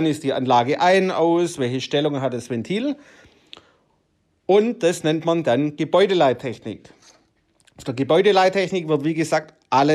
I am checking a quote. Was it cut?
no; 0 cuts

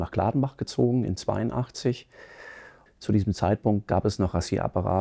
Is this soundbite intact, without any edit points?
no; 1 cut; at 2.9 s

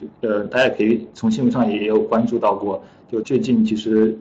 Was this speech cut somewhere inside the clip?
yes; 1 cut; at 3.2 s

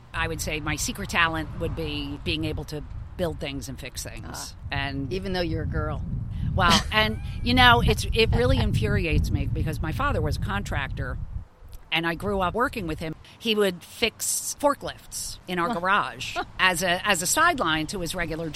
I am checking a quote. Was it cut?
no; 0 cuts

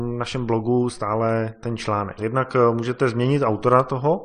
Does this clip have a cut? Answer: yes; 1 cut; at 2.2 s

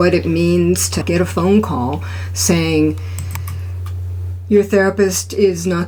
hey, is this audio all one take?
yes; 0 cuts

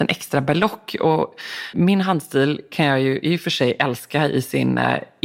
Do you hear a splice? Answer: yes; 1 cut; at 1.7 s

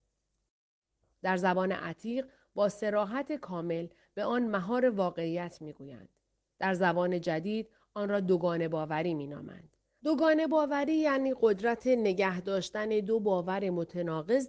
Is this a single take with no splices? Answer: no; 2 cuts; at 1.1 s, 10.0 s

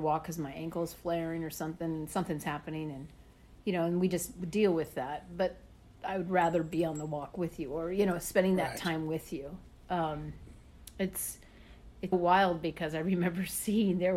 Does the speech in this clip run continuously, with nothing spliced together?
no; 1 cut; at 12.1 s

